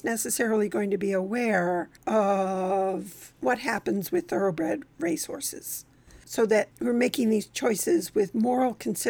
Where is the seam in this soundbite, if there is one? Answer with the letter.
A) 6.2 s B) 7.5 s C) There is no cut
A